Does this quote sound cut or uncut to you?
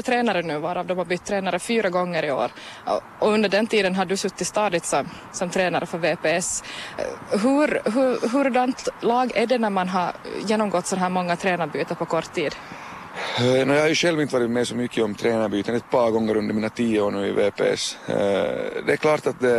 uncut